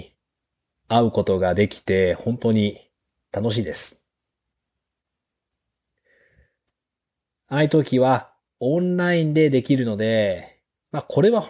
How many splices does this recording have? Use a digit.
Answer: 0